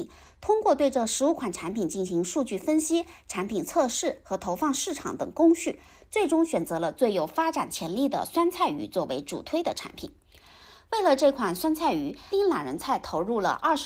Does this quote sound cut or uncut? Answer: cut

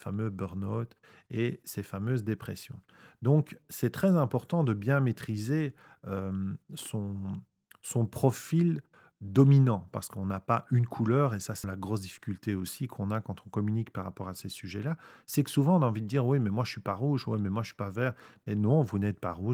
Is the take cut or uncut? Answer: cut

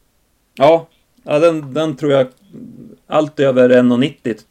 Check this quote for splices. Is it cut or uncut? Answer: uncut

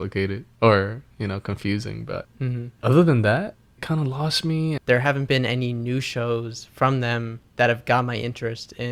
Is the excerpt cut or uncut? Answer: cut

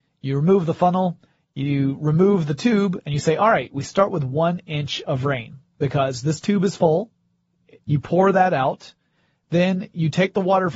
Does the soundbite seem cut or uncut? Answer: cut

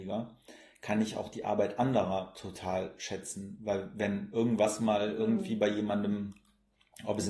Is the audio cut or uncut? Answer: uncut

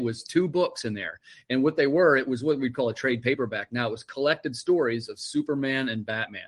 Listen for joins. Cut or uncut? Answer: uncut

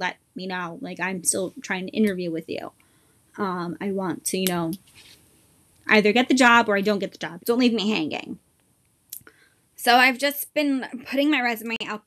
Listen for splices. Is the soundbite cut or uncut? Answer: cut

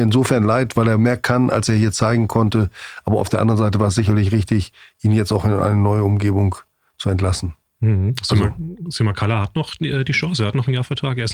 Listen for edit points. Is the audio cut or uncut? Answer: uncut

